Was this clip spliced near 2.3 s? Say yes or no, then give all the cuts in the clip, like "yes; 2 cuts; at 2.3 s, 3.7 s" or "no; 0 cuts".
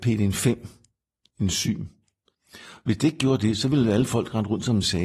yes; 1 cut; at 2.3 s